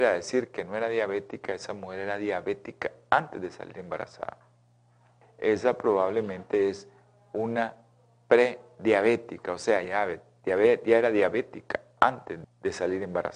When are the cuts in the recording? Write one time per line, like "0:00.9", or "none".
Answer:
0:05.2
0:09.8
0:12.4